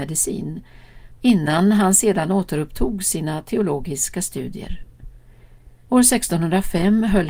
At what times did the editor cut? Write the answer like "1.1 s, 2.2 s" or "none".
1.2 s, 5.9 s